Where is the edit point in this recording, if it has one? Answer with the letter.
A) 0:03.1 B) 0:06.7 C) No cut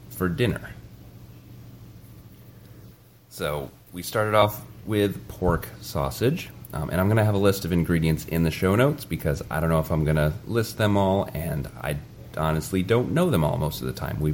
C